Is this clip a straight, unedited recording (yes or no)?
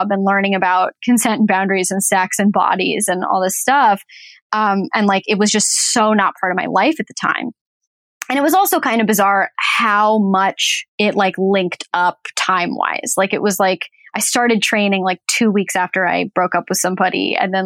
no